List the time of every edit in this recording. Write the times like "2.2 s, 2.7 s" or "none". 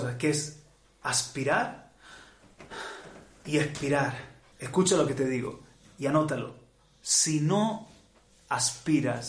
4.5 s